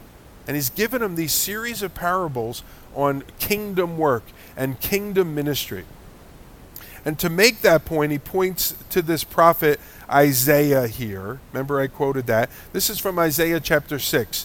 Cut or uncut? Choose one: uncut